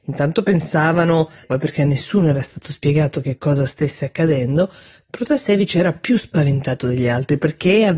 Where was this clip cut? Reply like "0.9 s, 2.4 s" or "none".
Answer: 1.4 s